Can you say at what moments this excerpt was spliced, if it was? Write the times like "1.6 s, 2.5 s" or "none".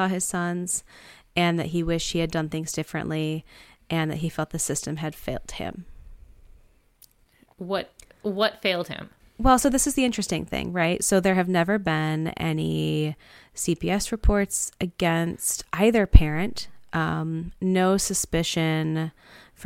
none